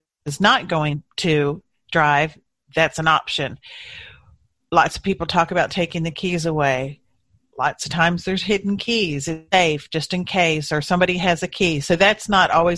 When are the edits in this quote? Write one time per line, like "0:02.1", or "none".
0:09.5